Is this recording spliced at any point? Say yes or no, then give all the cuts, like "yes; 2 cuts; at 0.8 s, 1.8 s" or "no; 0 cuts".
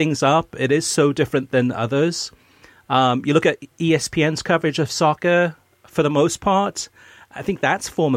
no; 0 cuts